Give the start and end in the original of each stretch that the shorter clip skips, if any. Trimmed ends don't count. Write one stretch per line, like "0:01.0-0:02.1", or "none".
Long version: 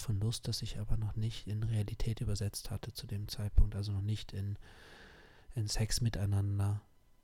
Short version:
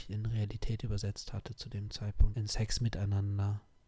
0:03.7-0:05.5